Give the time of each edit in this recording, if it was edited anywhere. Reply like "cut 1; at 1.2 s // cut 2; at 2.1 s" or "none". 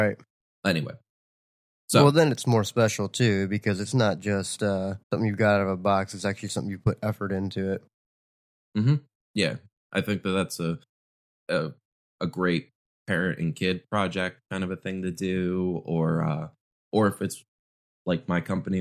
cut 1; at 5.0 s